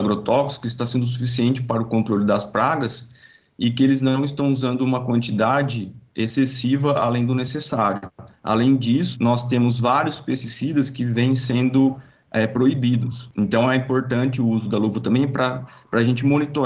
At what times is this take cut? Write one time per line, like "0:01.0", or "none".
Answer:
none